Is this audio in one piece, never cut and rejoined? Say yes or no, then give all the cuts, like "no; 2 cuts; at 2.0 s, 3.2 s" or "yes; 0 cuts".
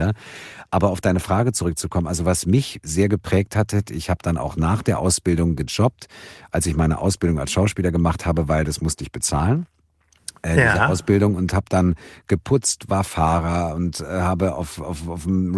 yes; 0 cuts